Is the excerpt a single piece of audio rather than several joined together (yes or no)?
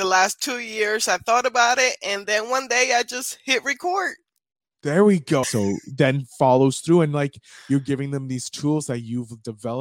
no